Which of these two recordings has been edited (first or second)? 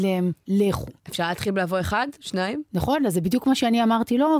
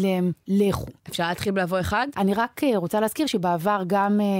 second